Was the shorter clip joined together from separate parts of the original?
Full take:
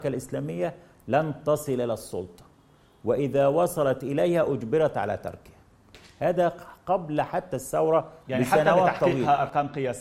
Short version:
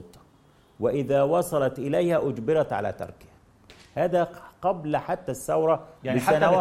no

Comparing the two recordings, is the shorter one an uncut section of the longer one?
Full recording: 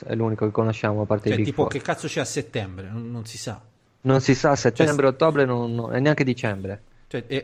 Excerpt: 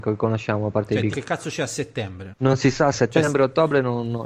no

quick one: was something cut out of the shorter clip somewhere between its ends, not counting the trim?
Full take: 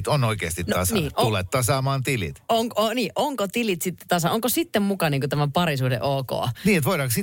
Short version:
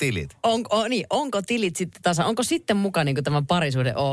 no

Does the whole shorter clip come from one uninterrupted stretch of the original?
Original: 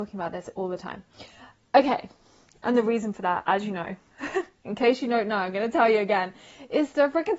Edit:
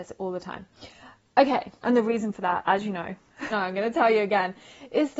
no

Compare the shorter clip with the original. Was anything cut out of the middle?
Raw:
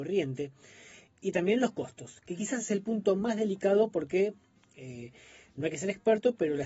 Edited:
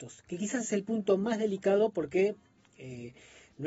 no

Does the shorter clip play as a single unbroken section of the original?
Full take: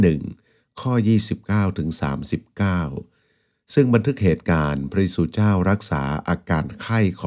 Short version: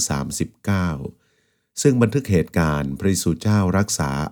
yes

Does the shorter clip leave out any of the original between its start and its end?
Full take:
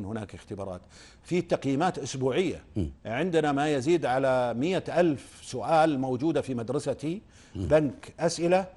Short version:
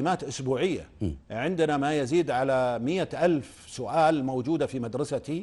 no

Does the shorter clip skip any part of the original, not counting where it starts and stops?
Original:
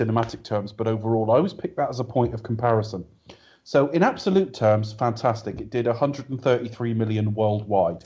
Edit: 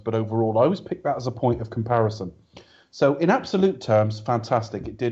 no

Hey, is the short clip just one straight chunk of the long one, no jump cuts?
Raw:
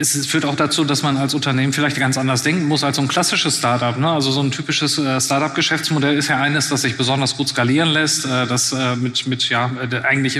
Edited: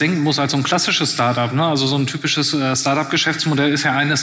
yes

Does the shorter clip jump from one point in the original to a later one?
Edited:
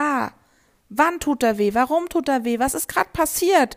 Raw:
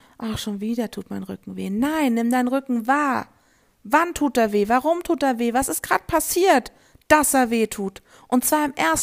no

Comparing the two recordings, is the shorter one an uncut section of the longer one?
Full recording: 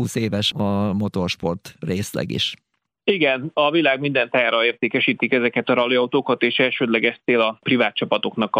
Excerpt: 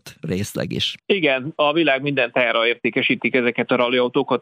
no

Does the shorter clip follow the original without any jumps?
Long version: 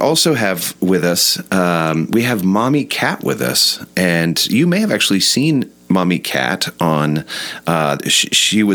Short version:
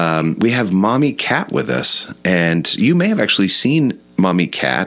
yes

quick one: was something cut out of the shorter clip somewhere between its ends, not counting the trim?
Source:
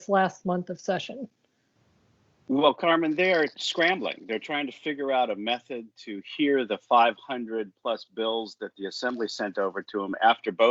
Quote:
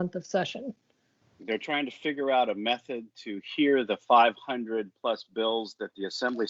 yes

